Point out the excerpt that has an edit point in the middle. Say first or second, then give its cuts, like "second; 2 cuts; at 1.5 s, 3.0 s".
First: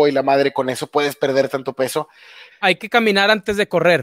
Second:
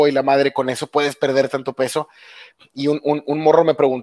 first; 1 cut; at 2.5 s